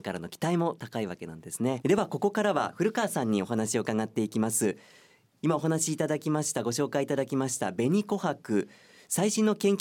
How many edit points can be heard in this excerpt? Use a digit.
1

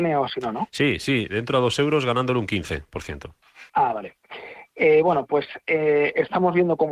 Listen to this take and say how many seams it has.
1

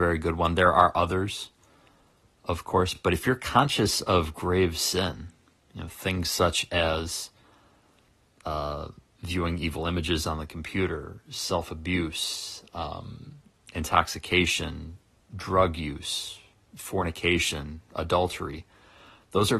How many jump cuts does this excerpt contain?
0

